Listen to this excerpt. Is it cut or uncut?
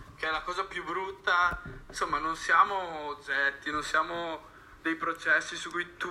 uncut